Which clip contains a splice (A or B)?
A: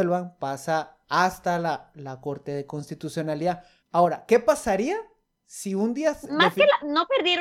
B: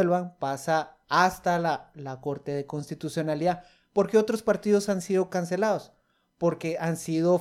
A